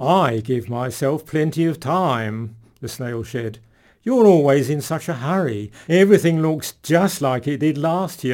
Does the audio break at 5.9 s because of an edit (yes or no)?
yes